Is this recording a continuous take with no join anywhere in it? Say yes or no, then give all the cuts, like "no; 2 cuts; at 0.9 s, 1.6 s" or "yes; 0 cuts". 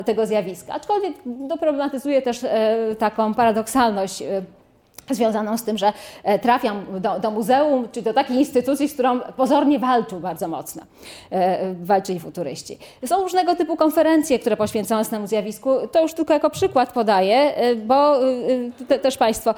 yes; 0 cuts